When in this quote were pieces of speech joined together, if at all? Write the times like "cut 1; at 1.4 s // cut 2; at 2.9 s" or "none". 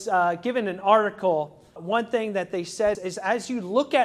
cut 1; at 1.8 s // cut 2; at 2.9 s